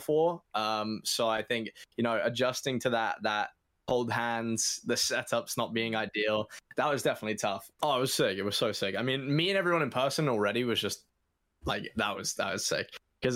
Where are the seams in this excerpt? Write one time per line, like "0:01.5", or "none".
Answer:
0:07.8

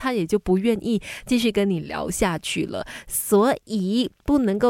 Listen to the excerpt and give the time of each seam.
none

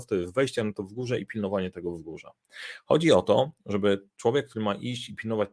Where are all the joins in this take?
none

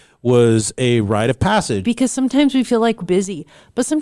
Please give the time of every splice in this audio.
0:01.8
0:03.0

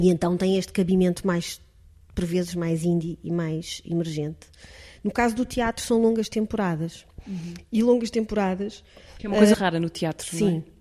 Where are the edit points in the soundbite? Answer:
0:09.5

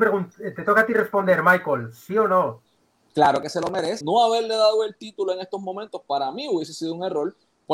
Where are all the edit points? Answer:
0:04.0

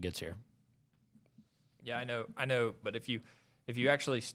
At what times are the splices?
0:02.8

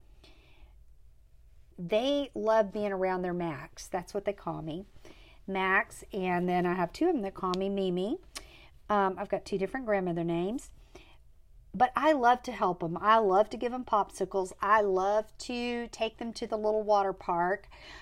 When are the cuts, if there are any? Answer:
0:01.7

